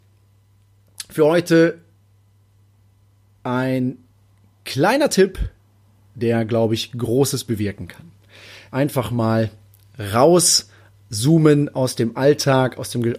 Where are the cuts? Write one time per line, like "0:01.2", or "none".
0:08.7